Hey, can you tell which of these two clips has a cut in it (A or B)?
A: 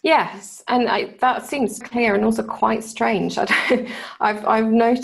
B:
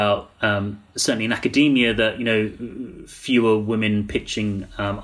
A